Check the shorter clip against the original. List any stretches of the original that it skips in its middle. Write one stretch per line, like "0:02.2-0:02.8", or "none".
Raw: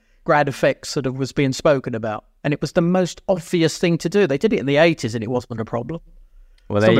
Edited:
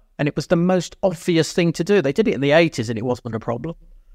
none